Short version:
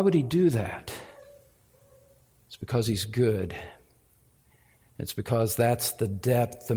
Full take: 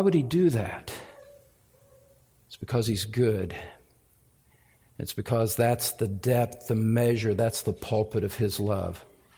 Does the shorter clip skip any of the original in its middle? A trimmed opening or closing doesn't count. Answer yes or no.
no